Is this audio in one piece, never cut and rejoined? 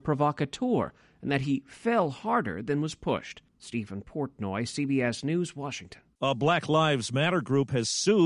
no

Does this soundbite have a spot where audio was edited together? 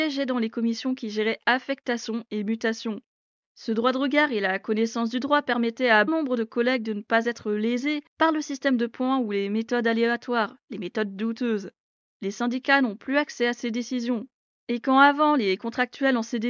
yes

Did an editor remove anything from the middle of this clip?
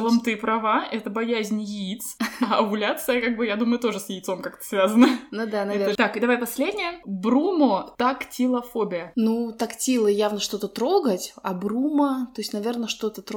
yes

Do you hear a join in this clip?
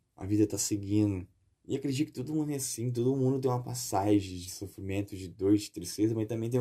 yes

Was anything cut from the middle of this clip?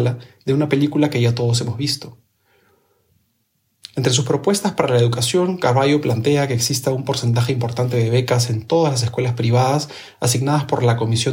no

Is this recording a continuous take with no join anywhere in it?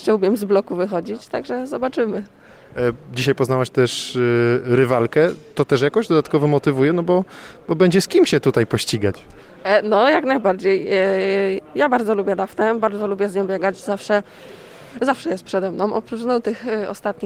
yes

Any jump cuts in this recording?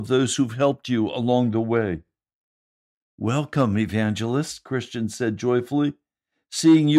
no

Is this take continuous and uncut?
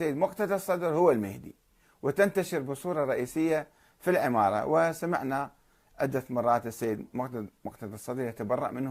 yes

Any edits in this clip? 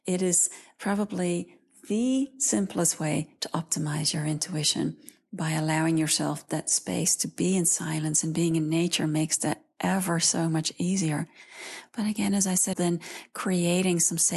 yes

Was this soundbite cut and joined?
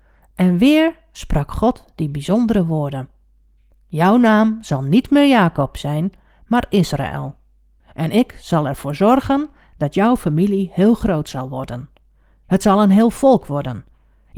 no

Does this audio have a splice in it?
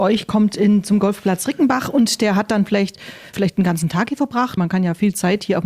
yes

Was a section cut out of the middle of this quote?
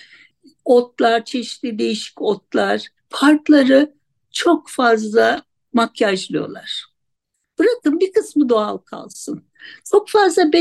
yes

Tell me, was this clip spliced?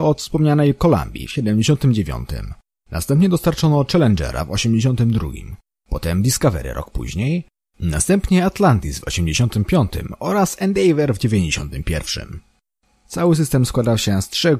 no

